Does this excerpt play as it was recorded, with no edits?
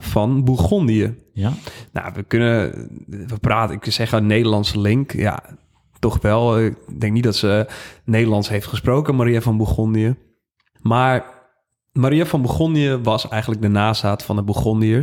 yes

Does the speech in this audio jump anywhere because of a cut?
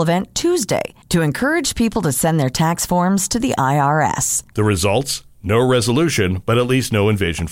yes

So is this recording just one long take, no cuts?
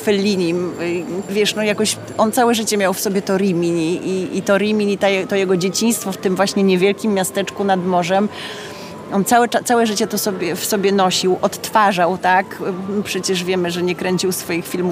no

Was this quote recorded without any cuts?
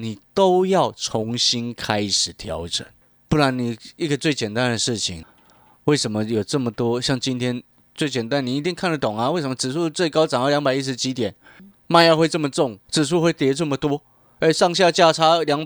no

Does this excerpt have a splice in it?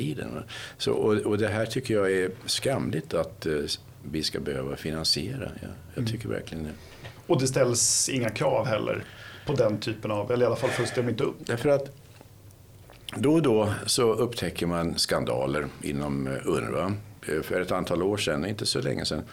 yes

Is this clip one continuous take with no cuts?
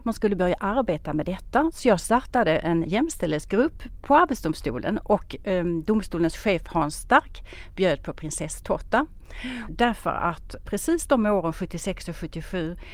no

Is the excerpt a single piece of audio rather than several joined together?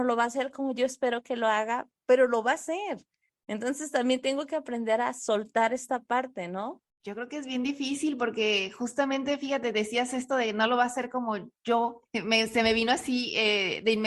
no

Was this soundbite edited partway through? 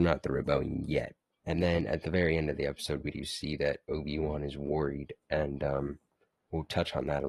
yes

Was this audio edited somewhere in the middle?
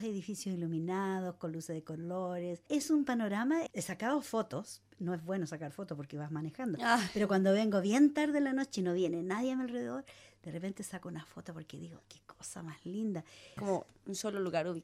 yes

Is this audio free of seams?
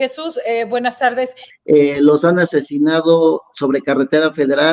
no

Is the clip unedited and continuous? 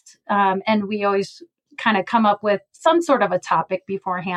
yes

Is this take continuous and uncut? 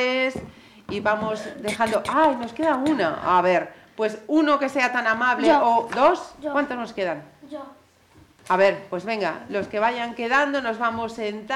yes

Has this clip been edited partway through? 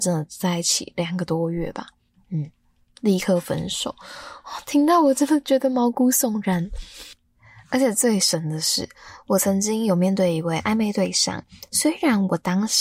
no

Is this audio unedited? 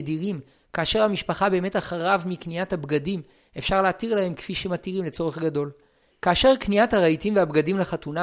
no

